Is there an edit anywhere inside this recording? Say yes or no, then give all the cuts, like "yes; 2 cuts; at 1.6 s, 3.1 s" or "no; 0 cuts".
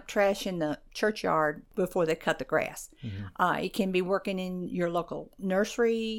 no; 0 cuts